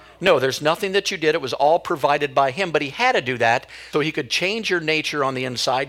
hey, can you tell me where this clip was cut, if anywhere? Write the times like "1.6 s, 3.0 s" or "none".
3.9 s

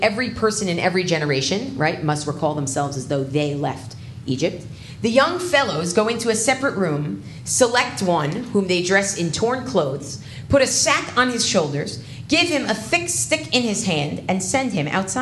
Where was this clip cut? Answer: none

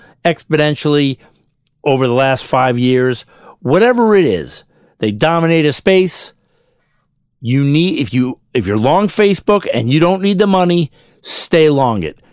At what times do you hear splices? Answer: none

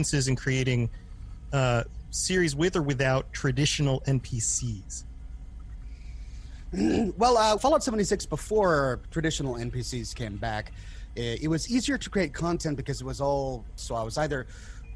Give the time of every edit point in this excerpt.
7.6 s, 13.8 s

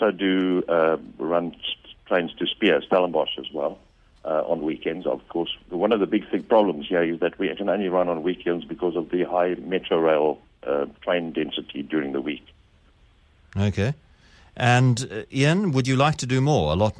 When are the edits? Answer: none

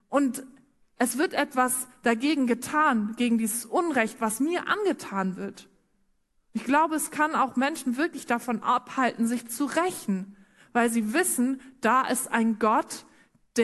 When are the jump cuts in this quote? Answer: none

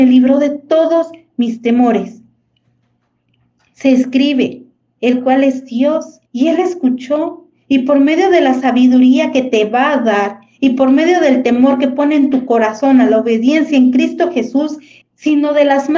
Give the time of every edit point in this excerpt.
4.8 s, 6.3 s, 15.0 s

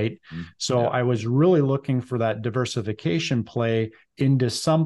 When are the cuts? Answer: none

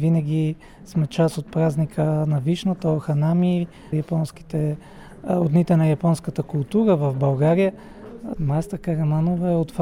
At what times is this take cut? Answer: 3.9 s, 8.4 s

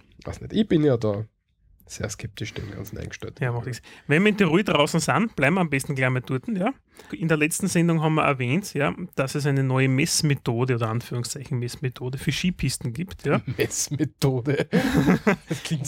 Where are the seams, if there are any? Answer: 7.1 s

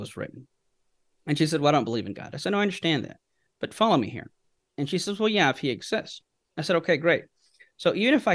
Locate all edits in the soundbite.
4.6 s

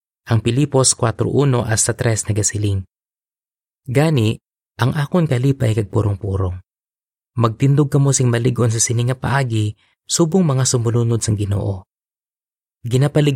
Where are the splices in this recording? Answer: 4.7 s

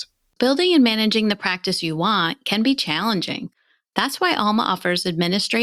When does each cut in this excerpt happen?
none

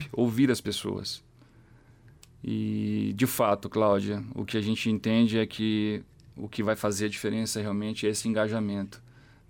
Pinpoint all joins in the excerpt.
none

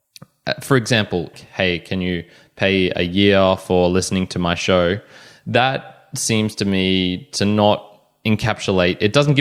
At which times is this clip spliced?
1.3 s

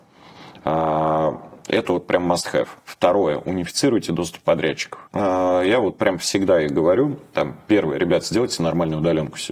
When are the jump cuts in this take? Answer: 5.1 s

